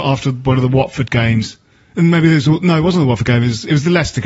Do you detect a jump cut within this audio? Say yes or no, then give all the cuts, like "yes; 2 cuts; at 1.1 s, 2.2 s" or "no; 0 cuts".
no; 0 cuts